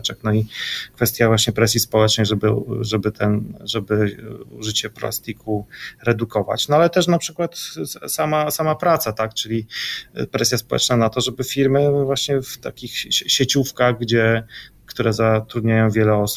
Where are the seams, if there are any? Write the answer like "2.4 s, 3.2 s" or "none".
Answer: none